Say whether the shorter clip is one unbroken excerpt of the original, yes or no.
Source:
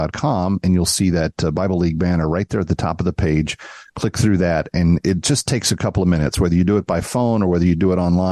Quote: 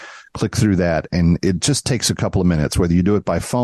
yes